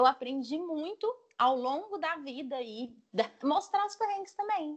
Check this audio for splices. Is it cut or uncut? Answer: cut